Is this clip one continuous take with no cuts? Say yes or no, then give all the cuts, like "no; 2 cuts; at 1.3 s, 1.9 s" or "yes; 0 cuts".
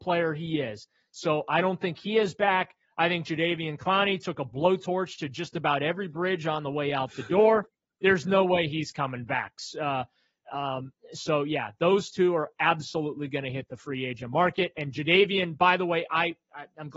yes; 0 cuts